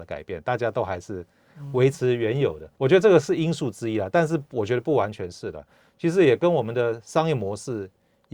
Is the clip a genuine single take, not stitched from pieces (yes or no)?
no